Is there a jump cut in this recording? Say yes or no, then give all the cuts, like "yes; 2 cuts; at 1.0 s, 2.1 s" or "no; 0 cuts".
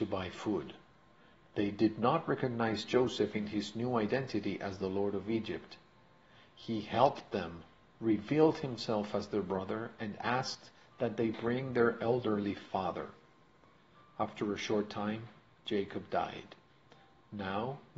no; 0 cuts